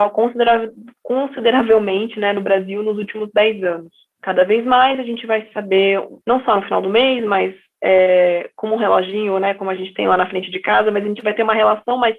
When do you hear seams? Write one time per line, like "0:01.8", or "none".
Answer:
0:04.1
0:06.2